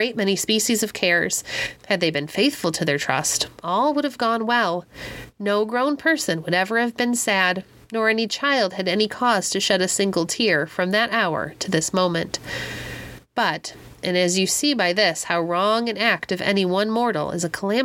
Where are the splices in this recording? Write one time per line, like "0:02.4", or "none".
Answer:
0:01.8